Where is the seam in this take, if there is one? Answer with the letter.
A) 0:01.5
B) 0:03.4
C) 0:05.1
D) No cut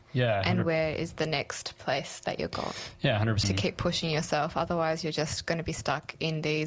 B